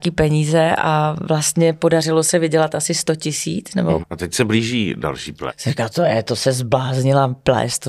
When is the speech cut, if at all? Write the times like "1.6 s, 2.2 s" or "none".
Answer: 4.0 s, 5.5 s